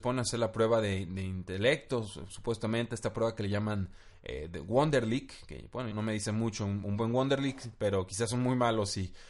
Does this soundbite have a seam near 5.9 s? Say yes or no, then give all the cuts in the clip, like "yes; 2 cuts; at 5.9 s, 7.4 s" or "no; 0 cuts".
yes; 1 cut; at 5.9 s